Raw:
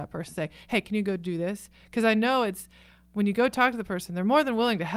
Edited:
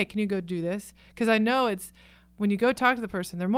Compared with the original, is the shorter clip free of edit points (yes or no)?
yes